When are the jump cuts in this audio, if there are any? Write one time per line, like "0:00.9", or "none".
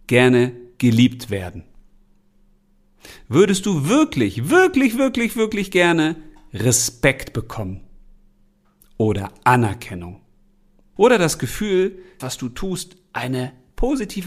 0:11.0
0:12.2